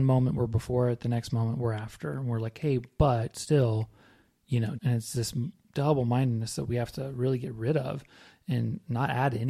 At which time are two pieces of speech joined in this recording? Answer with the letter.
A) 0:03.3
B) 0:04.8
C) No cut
B